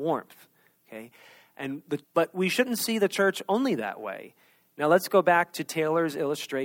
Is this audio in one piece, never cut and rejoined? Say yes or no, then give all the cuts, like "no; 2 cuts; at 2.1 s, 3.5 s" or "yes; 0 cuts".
no; 1 cut; at 2.0 s